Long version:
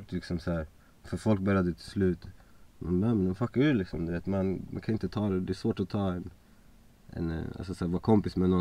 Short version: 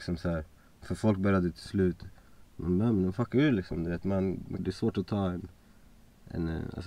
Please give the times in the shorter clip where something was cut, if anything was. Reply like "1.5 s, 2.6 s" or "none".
4.6 s